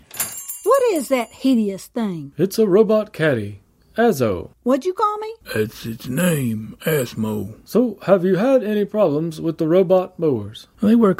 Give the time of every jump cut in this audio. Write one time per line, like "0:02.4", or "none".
none